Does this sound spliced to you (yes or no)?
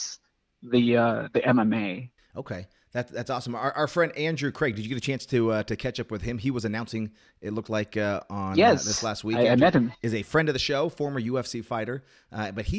no